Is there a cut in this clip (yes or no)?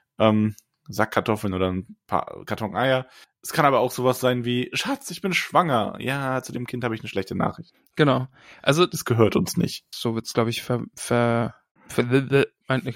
yes